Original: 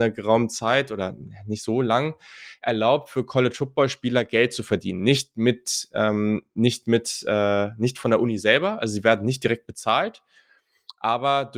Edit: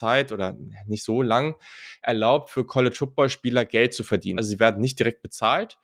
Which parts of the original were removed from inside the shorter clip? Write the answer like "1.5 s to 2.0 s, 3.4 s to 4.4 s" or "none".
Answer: 5.0 s to 8.8 s

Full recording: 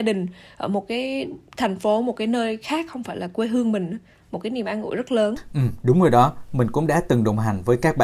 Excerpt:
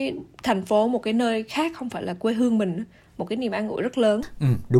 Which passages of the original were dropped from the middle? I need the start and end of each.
none

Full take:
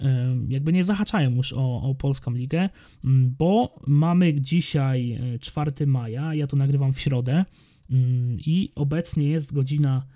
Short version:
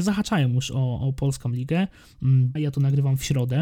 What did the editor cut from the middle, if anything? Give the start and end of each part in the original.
3.4 s to 6.3 s

